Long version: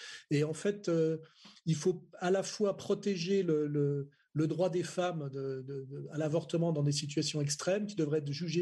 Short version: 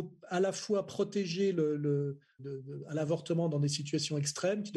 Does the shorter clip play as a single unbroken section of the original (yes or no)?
no